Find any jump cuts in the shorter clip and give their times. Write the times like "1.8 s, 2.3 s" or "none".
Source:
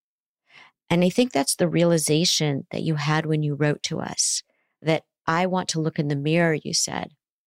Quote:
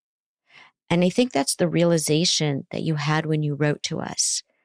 none